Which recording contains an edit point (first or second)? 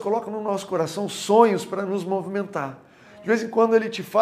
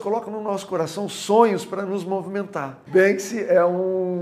second